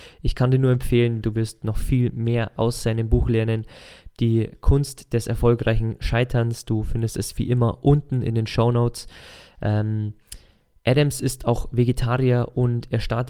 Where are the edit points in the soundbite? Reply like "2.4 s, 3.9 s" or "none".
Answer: 1.2 s